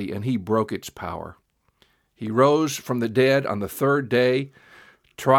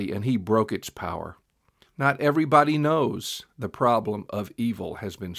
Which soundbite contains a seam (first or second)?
second